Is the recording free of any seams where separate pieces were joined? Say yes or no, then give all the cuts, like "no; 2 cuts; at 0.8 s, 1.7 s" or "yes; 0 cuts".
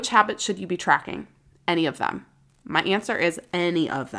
yes; 0 cuts